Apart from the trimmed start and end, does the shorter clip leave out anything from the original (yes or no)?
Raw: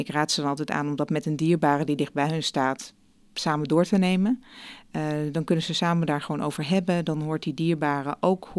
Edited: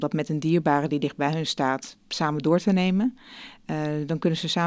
yes